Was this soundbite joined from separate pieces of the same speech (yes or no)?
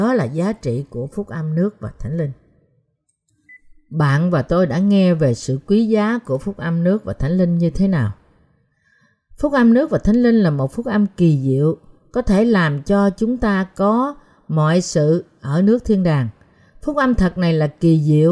no